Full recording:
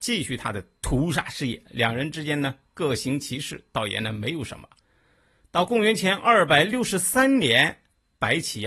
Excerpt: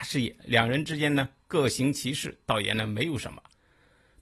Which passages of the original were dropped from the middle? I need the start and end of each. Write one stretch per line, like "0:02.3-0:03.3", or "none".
none